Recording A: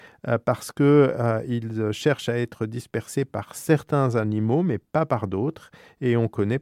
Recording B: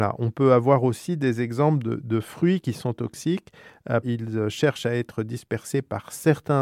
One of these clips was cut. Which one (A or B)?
B